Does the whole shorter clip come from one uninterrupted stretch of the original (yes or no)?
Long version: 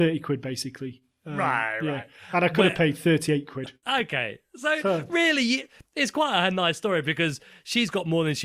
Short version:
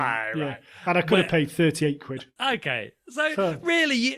yes